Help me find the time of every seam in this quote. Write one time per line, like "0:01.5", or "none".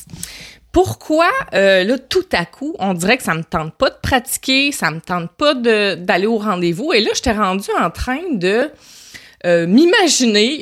none